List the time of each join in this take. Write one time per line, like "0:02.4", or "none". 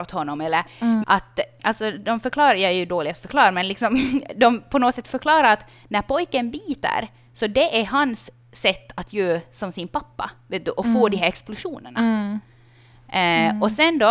0:01.0